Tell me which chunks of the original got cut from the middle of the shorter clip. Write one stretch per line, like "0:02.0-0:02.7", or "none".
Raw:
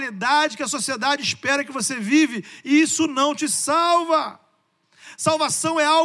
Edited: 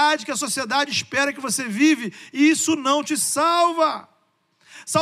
none